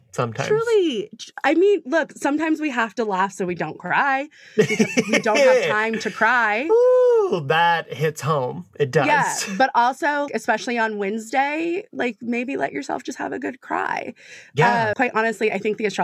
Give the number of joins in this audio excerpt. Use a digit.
2